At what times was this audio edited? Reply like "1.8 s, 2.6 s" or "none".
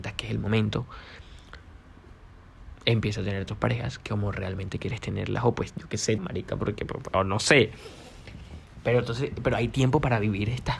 6.2 s